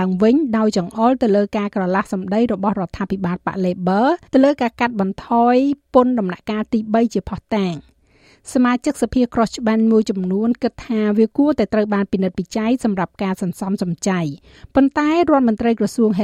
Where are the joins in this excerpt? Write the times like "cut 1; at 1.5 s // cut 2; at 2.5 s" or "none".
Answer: cut 1; at 4.3 s